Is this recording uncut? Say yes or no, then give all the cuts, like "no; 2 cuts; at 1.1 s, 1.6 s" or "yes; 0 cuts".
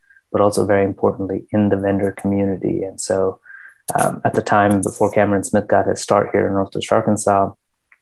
yes; 0 cuts